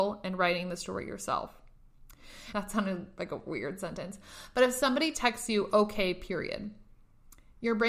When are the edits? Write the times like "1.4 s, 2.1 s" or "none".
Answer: 2.5 s